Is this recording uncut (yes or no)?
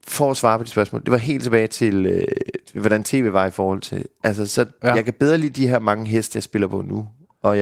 yes